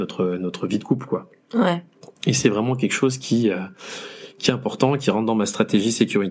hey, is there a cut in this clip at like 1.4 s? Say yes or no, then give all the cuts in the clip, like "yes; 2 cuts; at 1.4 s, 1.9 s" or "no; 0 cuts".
no; 0 cuts